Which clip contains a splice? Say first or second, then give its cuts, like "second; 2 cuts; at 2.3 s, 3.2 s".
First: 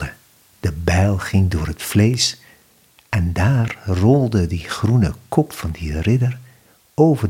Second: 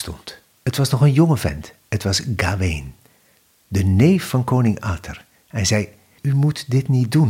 second; 1 cut; at 6.2 s